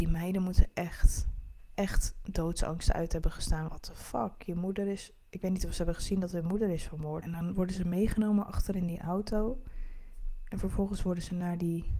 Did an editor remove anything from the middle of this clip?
yes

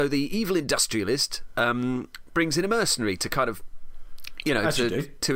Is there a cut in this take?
no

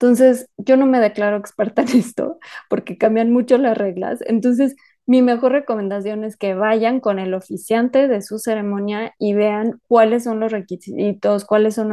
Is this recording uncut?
yes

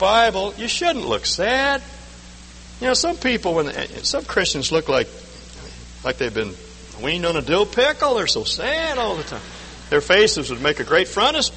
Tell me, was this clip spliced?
no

